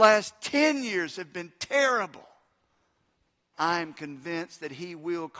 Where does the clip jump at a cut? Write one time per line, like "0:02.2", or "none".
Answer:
0:03.5